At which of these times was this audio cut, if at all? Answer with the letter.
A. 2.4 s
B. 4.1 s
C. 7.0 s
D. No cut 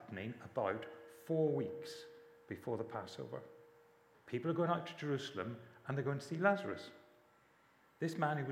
B